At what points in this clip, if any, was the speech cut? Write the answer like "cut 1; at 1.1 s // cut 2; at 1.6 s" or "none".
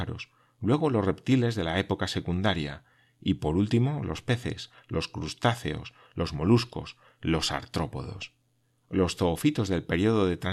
none